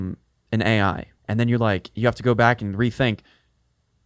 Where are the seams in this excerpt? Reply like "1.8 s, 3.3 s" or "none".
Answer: 1.2 s